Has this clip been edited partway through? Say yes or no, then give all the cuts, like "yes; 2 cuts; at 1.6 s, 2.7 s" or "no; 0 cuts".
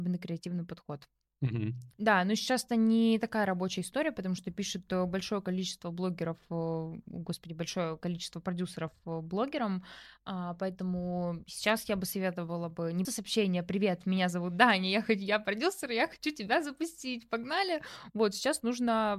yes; 2 cuts; at 1.9 s, 13.0 s